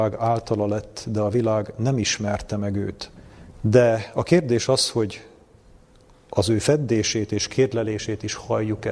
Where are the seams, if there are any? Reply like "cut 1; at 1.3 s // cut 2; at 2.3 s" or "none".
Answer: cut 1; at 3.5 s